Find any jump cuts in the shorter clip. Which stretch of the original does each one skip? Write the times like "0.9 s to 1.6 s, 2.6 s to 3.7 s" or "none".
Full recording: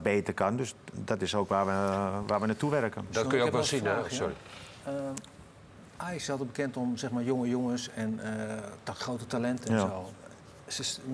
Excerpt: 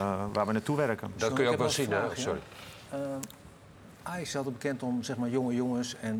none